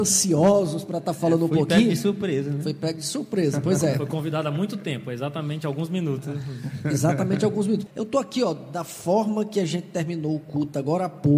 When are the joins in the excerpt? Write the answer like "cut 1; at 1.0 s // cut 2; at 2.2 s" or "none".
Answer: cut 1; at 7.9 s